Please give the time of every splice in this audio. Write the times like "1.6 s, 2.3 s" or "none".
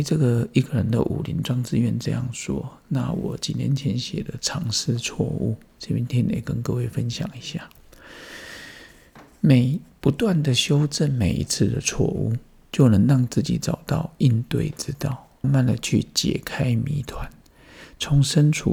15.4 s